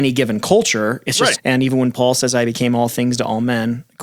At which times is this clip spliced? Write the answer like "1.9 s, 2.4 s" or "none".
1.4 s